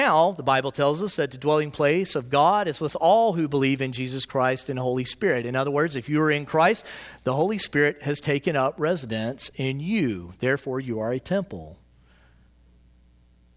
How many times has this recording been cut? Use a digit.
0